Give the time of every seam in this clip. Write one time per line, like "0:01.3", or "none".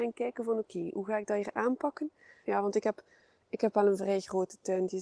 0:02.4